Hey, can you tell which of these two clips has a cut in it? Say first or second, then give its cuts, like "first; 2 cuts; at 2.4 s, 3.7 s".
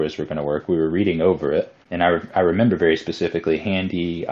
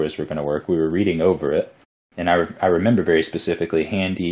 first; 1 cut; at 1.8 s